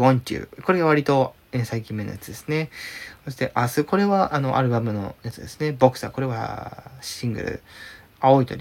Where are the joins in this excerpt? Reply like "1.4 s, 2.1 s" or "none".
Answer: none

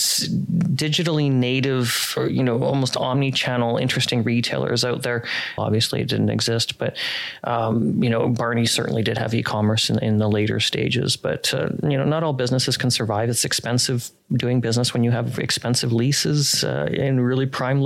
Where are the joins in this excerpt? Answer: 5.6 s

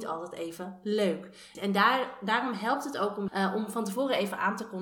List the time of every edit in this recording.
1.5 s, 3.3 s

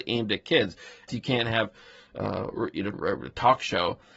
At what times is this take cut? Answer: 1.1 s, 2.9 s

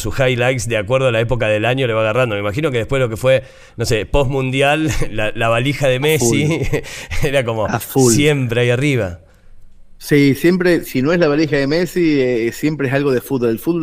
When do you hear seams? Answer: 10.9 s

